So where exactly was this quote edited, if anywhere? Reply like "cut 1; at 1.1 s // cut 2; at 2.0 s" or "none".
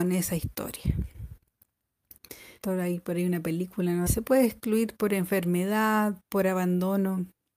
cut 1; at 2.6 s // cut 2; at 4.1 s

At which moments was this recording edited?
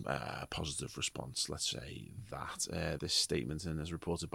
cut 1; at 1.7 s // cut 2; at 3.0 s

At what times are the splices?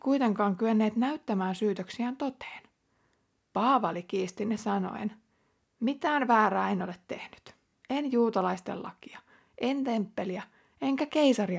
none

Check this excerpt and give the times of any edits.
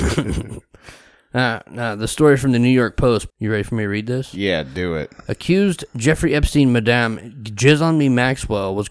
cut 1; at 3.3 s

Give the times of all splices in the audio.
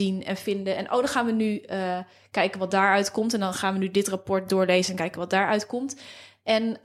none

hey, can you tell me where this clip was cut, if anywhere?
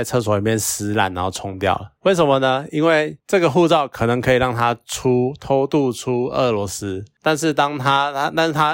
none

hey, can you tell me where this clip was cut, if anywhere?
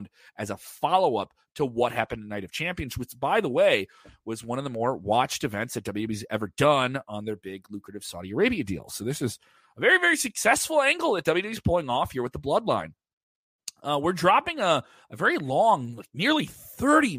none

